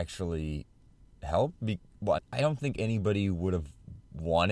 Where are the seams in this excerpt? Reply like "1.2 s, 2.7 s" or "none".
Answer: 2.2 s